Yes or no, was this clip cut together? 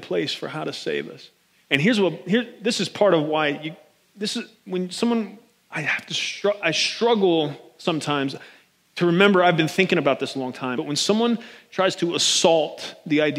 yes